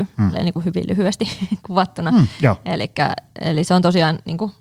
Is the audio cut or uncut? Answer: uncut